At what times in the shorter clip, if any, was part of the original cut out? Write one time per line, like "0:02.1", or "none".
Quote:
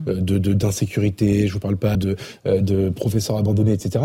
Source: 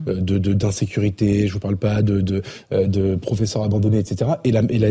0:01.9